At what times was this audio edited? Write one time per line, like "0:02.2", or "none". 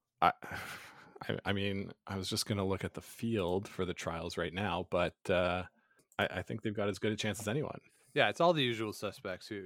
none